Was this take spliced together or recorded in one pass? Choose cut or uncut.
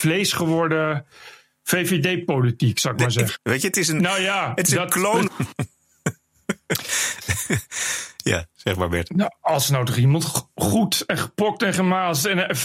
cut